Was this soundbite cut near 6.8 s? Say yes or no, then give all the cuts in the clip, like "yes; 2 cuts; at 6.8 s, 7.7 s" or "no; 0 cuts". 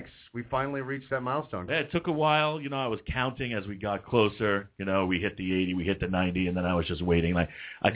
no; 1 cut; at 1.7 s